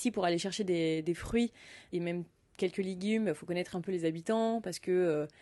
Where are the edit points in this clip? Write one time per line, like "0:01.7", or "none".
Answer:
none